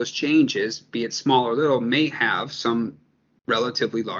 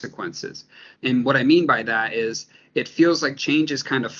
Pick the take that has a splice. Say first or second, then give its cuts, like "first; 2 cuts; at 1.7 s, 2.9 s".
second; 1 cut; at 1.0 s